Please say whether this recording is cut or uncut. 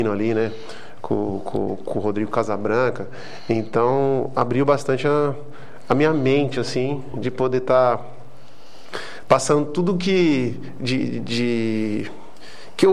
uncut